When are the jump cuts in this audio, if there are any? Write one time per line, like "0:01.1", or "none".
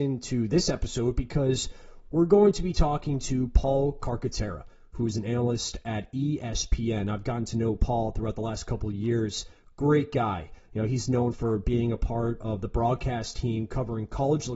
none